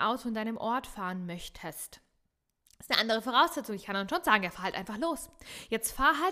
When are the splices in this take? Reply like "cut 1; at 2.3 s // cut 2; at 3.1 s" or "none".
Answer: none